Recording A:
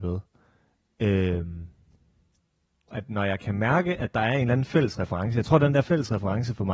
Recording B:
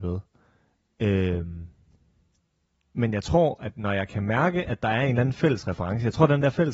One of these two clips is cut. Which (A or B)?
A